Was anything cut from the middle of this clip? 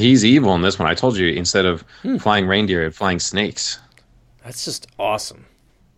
no; 0 cuts

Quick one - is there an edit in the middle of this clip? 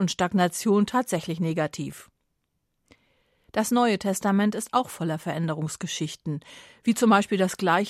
no; 0 cuts

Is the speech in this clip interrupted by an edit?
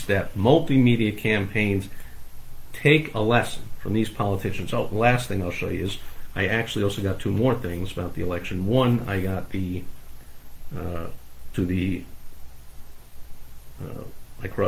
no; 0 cuts

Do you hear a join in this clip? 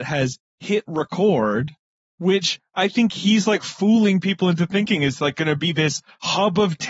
no; 0 cuts

